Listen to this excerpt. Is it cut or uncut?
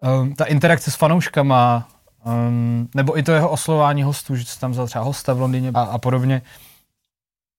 cut